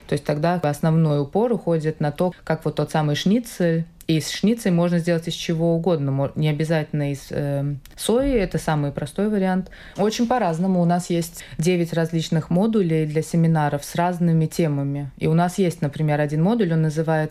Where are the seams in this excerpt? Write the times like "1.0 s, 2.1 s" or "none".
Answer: 10.0 s